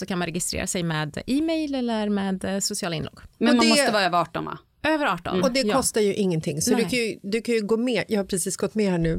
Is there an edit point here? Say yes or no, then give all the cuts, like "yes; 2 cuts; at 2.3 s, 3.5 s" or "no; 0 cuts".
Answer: no; 0 cuts